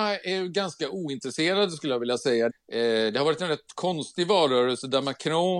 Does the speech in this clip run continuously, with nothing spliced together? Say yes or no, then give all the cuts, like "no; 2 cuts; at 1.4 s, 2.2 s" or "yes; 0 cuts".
no; 1 cut; at 2.5 s